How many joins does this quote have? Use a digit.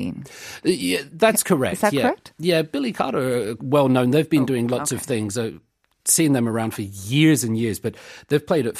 1